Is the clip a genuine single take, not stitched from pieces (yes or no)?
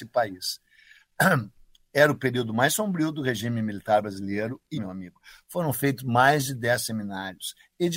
no